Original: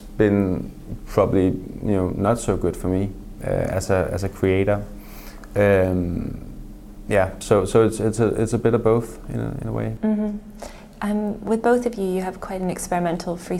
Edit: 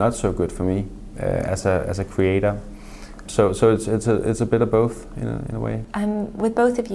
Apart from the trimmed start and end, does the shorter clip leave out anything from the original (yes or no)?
yes